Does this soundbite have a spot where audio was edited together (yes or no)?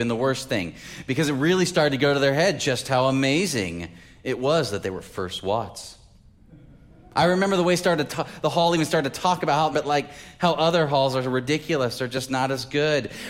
yes